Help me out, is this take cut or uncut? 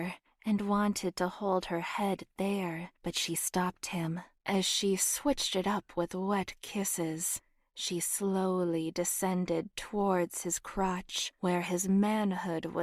cut